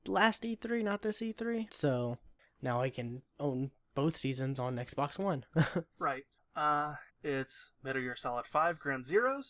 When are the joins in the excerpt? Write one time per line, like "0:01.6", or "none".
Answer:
0:01.7
0:07.1